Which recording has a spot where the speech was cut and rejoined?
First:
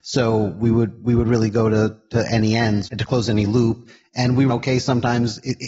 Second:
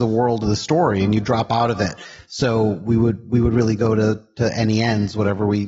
first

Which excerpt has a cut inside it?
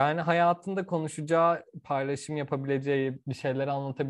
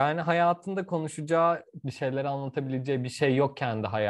second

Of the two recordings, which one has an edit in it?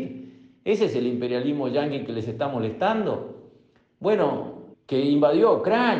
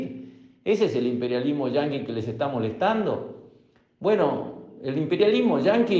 first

